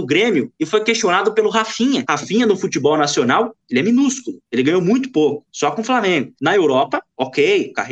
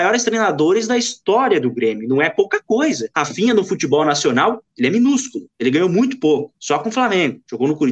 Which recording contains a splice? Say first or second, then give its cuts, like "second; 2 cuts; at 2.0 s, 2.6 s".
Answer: first; 2 cuts; at 2.0 s, 6.3 s